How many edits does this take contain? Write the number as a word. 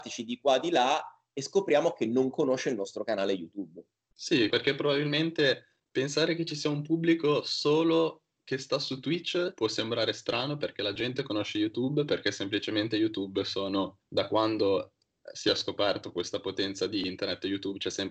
one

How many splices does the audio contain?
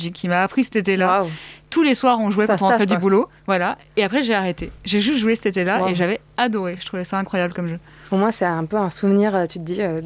zero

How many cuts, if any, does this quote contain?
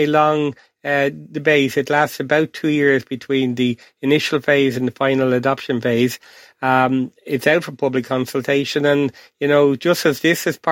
zero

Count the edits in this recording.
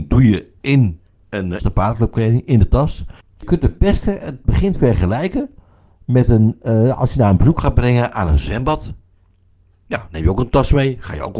two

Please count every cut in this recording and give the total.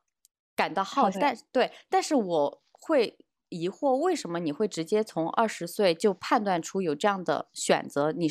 one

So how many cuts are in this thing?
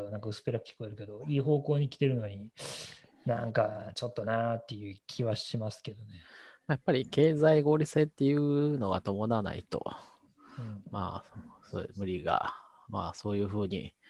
zero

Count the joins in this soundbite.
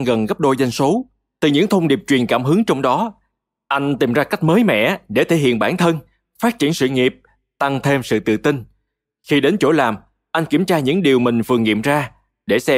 one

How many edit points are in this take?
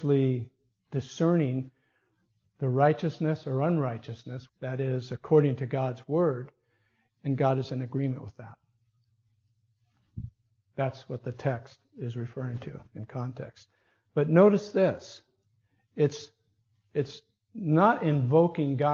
one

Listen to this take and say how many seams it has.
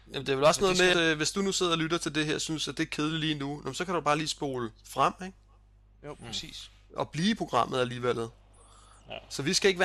one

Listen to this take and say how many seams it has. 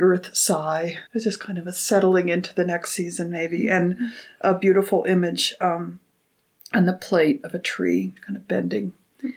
one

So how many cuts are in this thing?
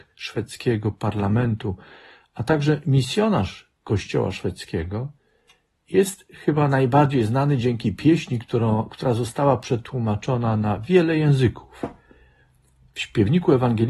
zero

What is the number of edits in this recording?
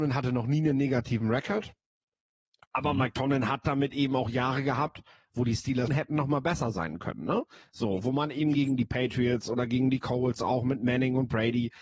one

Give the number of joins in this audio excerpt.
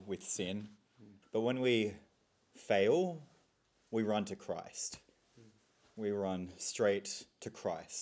one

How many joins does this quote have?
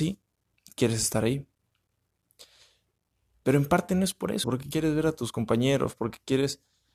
one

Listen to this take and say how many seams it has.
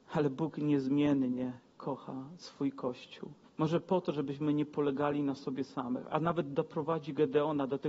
one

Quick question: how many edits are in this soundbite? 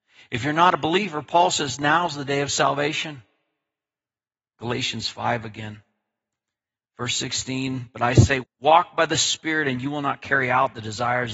two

